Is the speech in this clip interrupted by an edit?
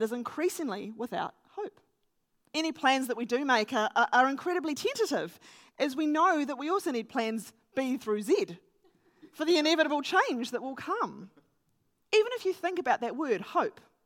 yes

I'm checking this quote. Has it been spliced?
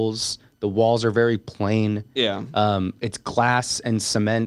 no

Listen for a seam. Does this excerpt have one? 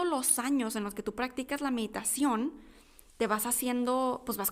no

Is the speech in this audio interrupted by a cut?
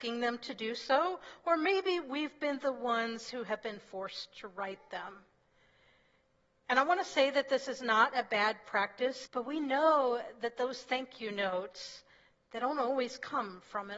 yes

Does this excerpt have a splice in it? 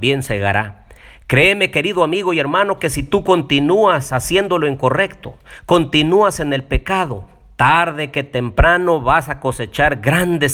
no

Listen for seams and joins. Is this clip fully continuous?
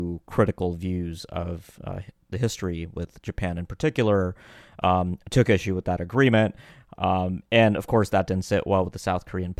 no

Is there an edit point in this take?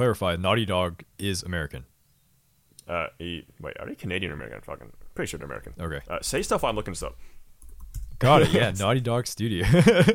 yes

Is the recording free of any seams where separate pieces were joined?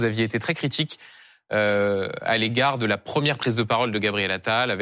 yes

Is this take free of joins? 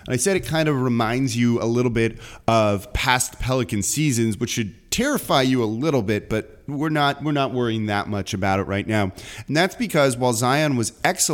yes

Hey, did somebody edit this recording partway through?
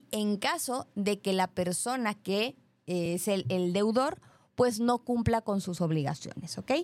no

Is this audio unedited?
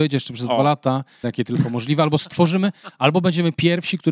no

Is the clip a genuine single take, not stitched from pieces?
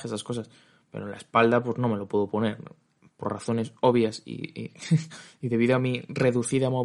yes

